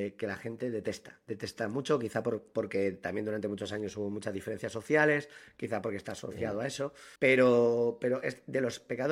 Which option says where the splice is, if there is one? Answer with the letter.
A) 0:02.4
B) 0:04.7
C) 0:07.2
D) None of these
C